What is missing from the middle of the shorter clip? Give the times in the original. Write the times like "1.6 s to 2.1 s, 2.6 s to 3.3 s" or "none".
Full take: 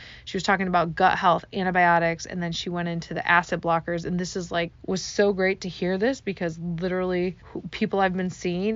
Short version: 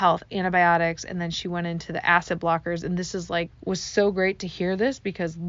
none